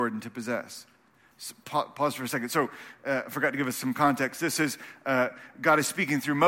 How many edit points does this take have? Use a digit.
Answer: 0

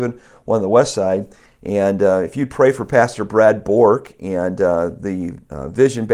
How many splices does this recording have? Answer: 1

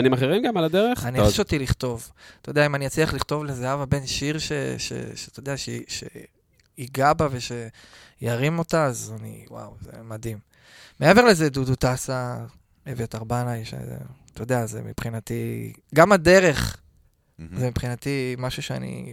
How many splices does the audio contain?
1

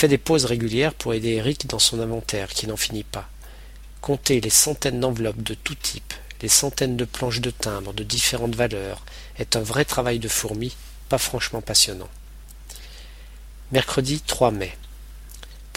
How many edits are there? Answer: 0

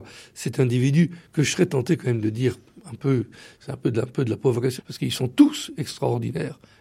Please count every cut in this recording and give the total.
1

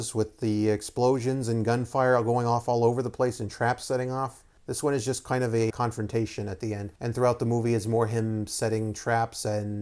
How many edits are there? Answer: 2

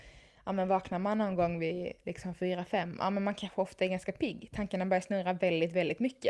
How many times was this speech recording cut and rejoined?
0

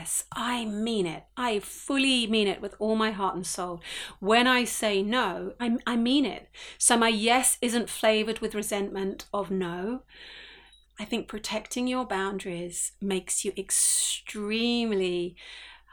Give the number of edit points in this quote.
2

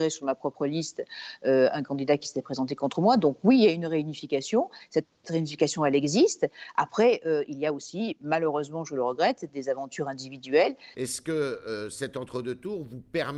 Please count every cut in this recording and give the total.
1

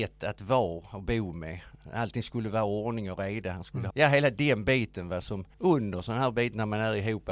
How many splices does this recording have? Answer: 2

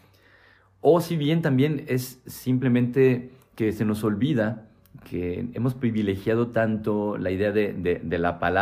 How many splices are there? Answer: 0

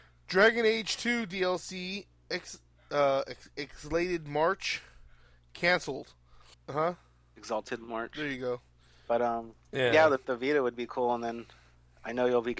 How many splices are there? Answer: 3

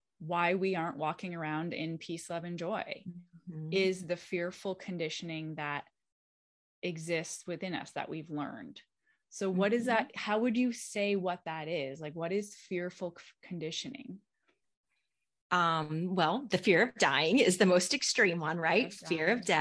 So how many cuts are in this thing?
0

